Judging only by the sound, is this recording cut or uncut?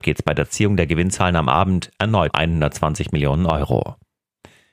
cut